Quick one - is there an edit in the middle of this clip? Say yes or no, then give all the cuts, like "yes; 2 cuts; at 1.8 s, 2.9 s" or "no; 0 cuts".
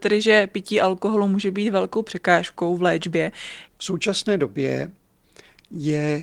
yes; 1 cut; at 3.7 s